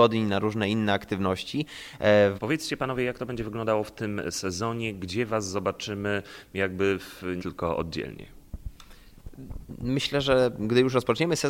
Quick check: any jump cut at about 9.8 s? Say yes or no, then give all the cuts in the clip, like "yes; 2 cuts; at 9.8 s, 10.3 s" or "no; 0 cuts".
no; 2 cuts; at 2.4 s, 7.4 s